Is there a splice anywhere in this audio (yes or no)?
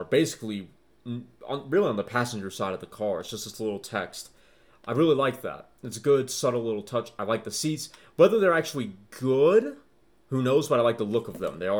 no